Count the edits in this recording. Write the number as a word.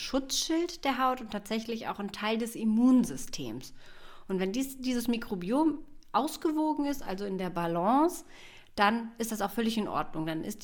zero